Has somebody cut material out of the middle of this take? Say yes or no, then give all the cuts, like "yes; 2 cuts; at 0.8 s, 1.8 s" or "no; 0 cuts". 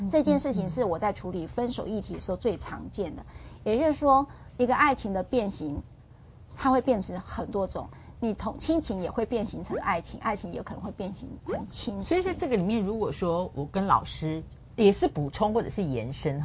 no; 0 cuts